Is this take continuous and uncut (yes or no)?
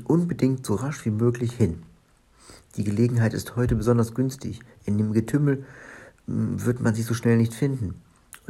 yes